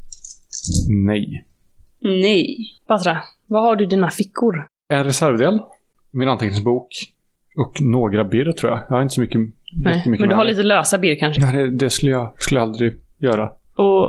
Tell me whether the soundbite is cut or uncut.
cut